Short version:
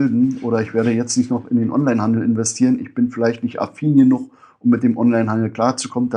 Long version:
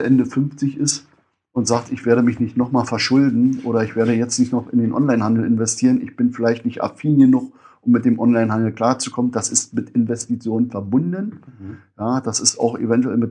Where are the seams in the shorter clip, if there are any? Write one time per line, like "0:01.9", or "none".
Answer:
none